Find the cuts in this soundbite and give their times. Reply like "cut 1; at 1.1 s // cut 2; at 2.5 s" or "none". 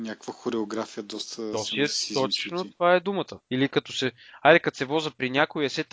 cut 1; at 3.4 s